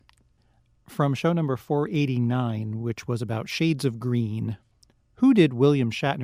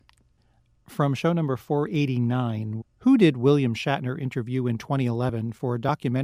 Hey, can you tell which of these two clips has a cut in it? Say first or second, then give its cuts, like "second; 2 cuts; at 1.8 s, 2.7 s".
second; 1 cut; at 2.8 s